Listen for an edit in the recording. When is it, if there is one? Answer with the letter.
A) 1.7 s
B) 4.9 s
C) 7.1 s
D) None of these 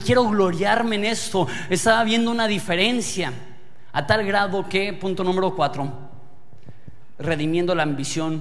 D